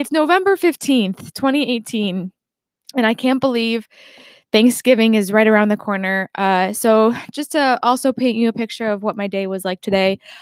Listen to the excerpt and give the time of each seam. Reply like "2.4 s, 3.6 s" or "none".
none